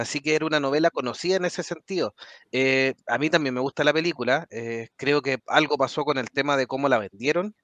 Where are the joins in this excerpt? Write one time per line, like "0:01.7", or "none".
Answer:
0:02.4